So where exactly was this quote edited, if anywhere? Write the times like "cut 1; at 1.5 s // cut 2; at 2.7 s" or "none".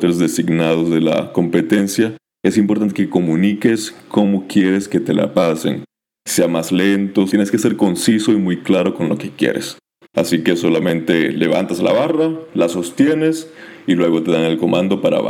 cut 1; at 7.3 s // cut 2; at 10.0 s